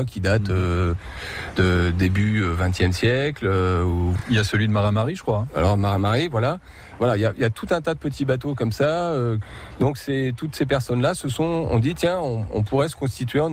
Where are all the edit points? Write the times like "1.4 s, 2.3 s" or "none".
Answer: none